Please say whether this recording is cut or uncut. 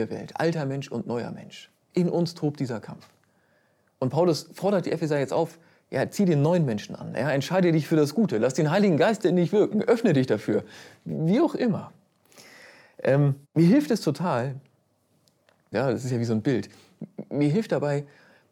cut